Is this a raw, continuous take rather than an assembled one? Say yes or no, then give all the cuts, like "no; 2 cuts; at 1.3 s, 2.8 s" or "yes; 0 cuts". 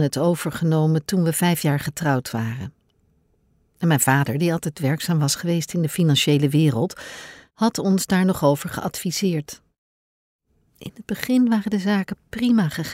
yes; 0 cuts